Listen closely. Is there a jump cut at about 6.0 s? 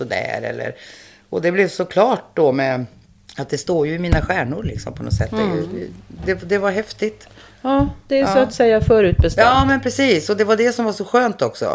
no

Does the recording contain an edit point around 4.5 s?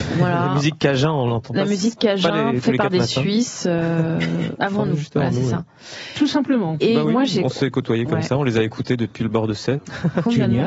yes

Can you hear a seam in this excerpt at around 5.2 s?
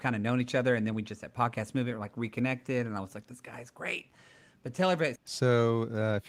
yes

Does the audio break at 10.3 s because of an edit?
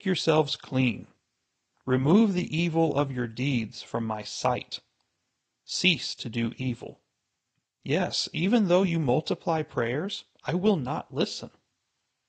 yes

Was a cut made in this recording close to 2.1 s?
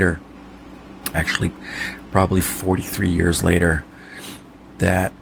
no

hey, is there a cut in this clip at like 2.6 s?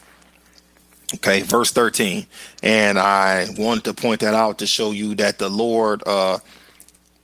yes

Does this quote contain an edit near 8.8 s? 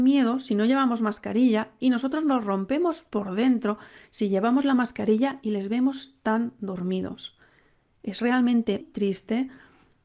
yes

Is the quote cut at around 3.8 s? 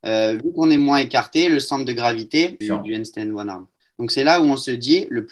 yes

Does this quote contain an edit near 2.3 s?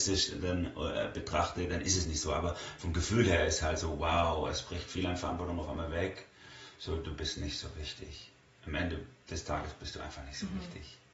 no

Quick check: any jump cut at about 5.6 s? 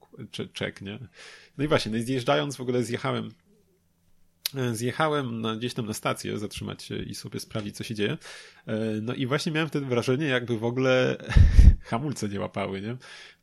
no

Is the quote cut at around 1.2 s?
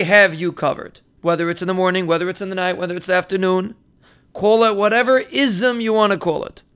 yes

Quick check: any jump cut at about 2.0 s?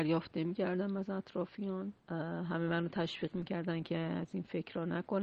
yes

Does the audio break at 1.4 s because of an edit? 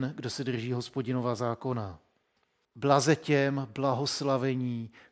no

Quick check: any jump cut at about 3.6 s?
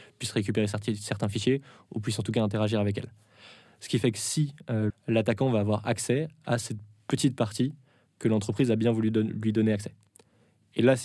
yes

